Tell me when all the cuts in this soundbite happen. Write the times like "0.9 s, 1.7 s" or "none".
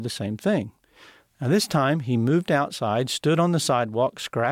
none